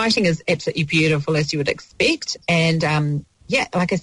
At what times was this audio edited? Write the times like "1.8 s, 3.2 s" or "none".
none